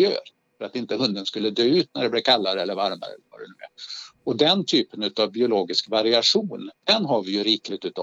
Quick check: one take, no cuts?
no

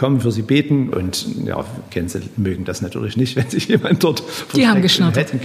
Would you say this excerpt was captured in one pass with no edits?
no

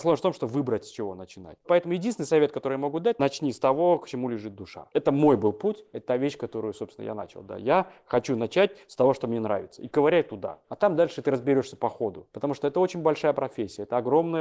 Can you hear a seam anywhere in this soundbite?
no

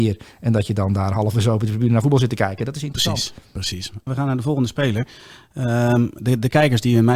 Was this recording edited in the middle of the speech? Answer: yes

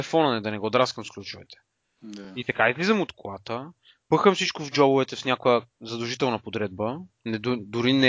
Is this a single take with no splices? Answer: yes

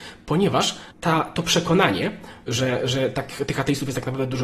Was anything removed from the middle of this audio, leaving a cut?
yes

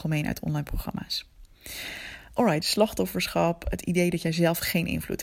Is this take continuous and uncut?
no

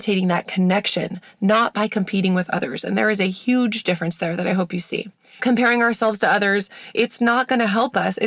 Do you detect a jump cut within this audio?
no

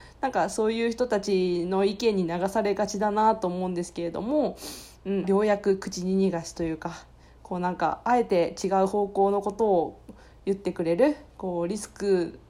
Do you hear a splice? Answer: yes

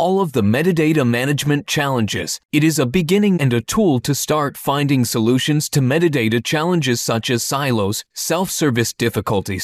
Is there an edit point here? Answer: yes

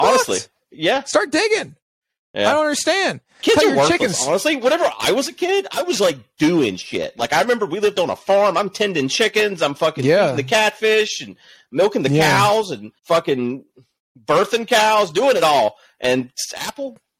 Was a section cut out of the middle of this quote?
yes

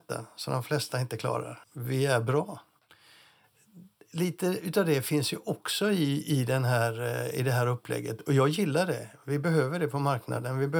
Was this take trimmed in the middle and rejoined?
yes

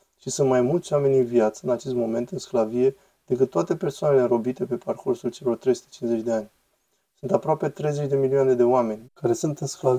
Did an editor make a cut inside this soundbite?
yes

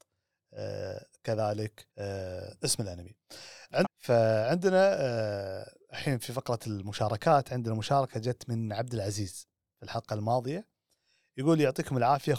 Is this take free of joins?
no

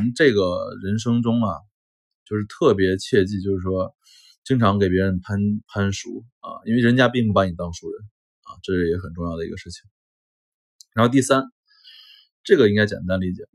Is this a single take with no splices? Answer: yes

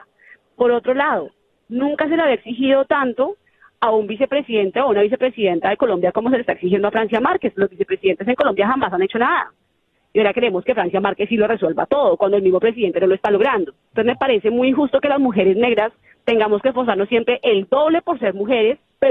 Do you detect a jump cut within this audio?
yes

